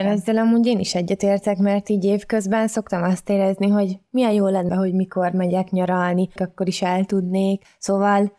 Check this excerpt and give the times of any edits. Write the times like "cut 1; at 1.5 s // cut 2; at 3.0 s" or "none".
cut 1; at 4.7 s // cut 2; at 6.4 s